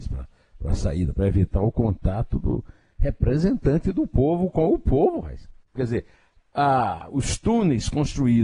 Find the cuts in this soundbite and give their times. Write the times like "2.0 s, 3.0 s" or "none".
5.8 s